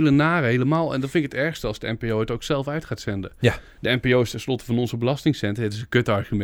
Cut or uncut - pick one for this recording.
uncut